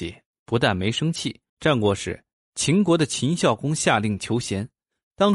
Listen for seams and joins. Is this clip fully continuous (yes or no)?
no